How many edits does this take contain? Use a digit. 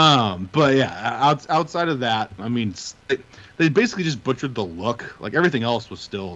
1